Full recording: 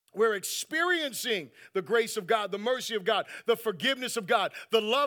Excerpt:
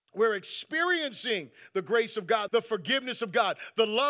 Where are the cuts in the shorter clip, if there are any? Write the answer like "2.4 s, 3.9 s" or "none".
2.5 s